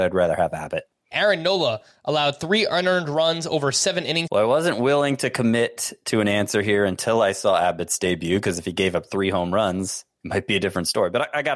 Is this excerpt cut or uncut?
cut